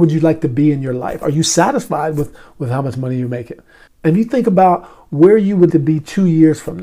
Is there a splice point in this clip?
yes; 3 cuts; at 1.2 s, 3.9 s, 5.7 s

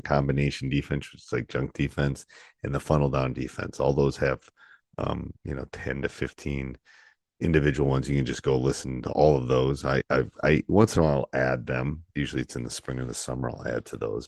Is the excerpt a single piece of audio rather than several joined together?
yes; 0 cuts

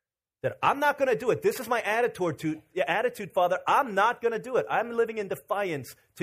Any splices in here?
yes; 1 cut; at 3.3 s

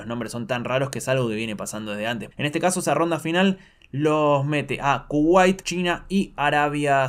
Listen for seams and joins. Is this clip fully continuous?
no; 2 cuts; at 2.3 s, 5.6 s

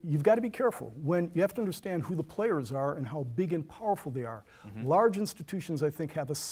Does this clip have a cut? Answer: no; 0 cuts

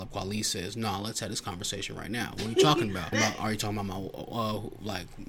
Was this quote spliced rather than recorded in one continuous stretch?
yes; 1 cut; at 3.1 s

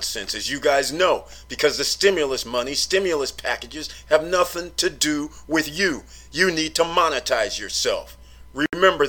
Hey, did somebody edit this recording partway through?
no; 0 cuts

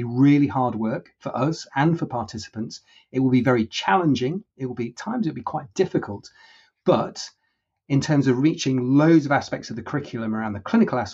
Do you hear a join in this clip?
no; 0 cuts

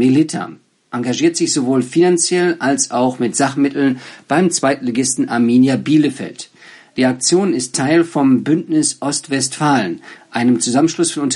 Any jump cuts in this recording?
no; 0 cuts

